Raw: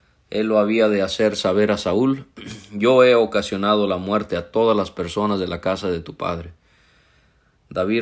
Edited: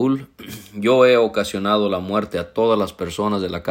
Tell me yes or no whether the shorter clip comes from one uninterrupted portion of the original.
yes